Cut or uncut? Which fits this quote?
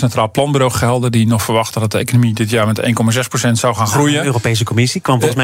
uncut